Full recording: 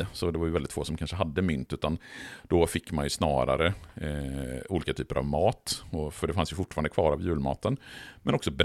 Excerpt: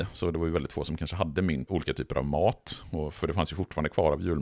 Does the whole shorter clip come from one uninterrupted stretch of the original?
no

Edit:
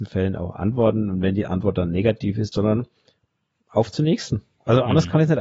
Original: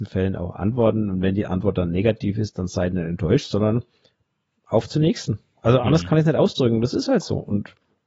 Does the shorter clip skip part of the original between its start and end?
yes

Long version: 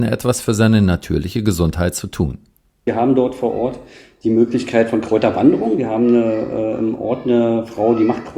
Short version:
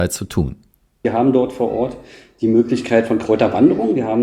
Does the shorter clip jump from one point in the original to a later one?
no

